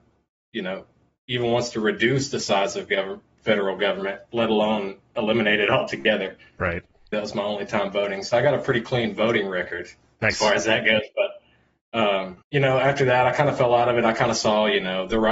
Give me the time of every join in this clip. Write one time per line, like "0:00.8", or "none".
0:07.1
0:12.4